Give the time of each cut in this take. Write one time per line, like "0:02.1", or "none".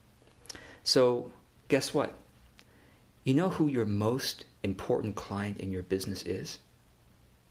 0:04.5